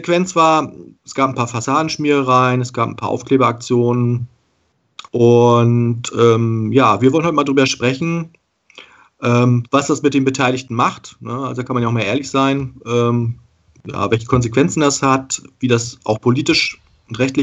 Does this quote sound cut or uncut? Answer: cut